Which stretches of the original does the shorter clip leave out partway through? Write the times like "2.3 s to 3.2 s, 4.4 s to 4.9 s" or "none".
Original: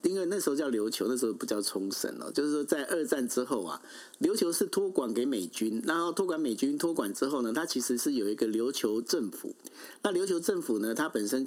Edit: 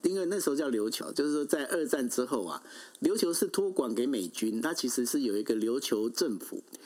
1.0 s to 2.2 s, 5.8 s to 7.5 s